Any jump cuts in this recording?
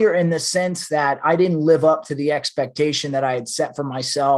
no; 0 cuts

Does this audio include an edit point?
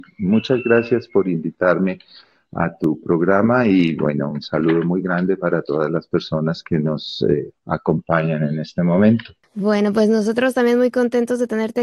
no; 0 cuts

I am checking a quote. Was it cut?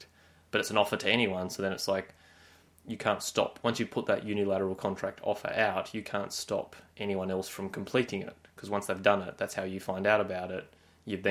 no; 0 cuts

